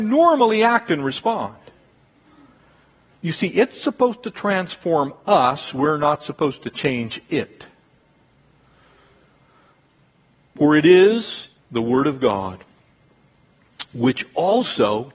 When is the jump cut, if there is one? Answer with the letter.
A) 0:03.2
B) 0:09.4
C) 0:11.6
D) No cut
C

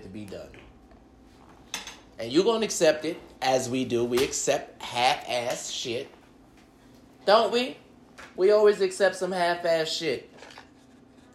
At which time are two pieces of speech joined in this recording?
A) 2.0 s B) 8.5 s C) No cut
C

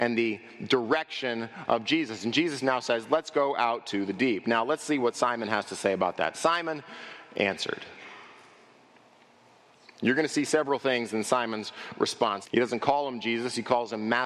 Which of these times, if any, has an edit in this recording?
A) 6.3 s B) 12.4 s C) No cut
B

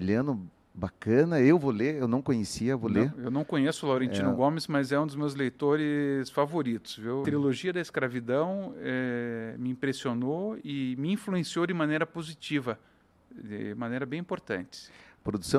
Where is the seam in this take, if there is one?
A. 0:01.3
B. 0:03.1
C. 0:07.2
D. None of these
C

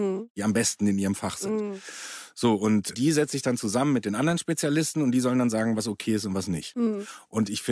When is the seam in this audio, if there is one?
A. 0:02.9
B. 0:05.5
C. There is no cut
A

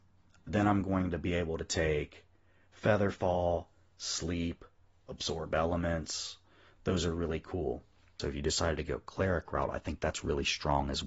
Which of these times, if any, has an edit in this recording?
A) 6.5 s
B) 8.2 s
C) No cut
B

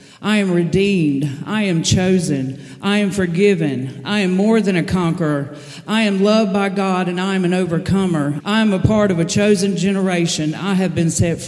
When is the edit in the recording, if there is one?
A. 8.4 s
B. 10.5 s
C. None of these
A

